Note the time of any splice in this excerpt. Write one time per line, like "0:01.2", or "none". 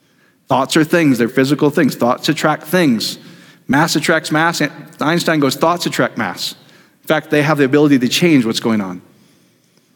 0:01.3